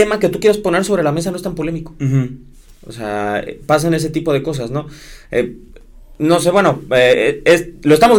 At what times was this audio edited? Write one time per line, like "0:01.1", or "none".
none